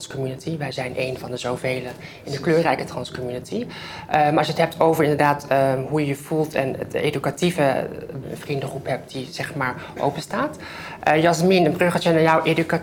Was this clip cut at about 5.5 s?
no; 2 cuts; at 8.2 s, 11.0 s

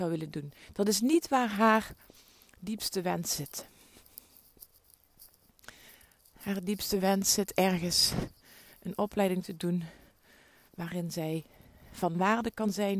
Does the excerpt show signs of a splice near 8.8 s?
no; 0 cuts

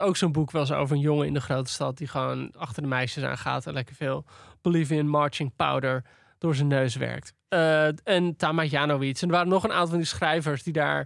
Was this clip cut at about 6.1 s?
no; 0 cuts

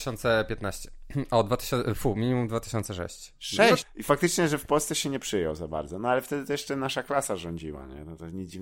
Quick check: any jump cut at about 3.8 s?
yes; 1 cut; at 3.8 s

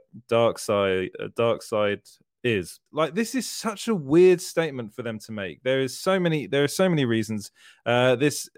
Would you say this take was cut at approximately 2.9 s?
yes; 1 cut; at 2.9 s

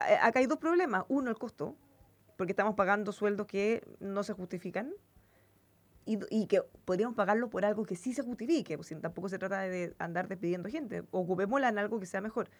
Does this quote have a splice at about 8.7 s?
no; 0 cuts

